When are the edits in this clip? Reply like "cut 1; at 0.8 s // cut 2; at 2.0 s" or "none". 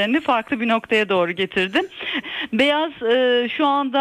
cut 1; at 2.2 s